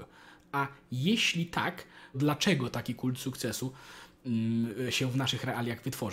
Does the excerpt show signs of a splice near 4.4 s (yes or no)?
no